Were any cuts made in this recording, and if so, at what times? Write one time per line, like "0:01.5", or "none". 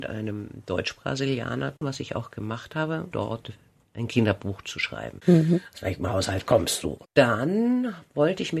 0:01.8
0:03.1
0:05.2